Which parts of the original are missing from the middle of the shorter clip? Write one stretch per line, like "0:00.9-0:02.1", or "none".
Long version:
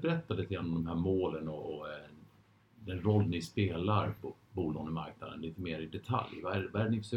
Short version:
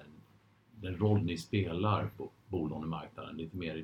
none